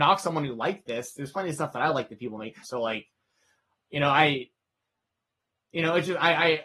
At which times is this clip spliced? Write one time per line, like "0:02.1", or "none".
0:02.6